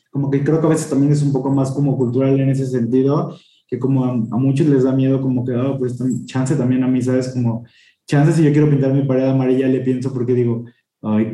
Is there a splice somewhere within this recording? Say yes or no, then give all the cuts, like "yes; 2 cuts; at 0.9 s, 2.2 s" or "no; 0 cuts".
no; 0 cuts